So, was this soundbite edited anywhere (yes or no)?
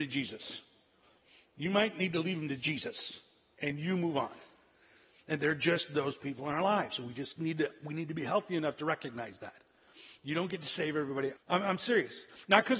yes